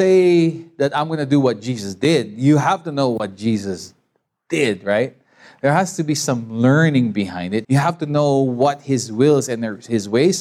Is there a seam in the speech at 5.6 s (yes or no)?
no